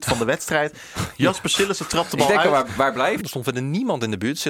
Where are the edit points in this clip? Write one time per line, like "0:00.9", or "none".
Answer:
0:03.2